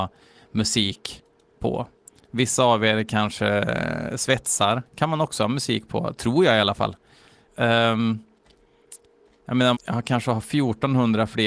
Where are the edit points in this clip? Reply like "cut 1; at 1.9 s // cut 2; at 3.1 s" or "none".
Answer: cut 1; at 7.5 s // cut 2; at 9.7 s